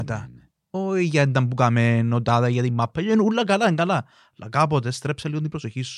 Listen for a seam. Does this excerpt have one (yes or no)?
no